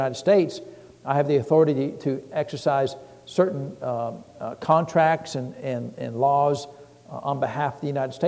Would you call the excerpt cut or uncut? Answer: uncut